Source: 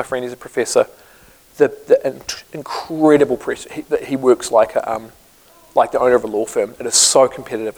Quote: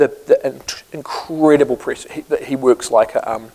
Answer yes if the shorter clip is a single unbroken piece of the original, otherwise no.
yes